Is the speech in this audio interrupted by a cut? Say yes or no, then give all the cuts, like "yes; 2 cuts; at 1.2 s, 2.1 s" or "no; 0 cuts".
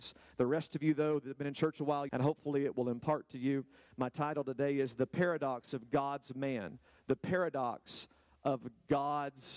yes; 1 cut; at 2.1 s